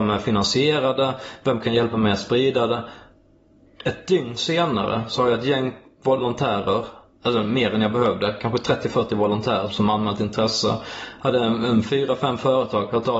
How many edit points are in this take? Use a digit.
1